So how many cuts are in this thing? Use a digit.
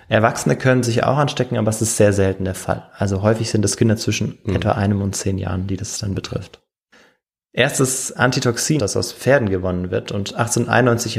1